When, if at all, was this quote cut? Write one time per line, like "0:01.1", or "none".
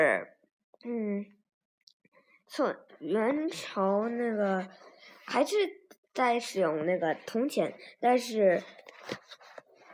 0:02.9